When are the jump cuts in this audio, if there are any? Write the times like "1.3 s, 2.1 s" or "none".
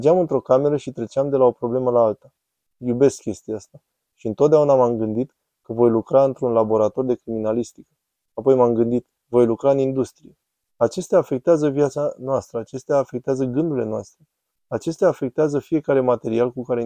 9.2 s, 10.7 s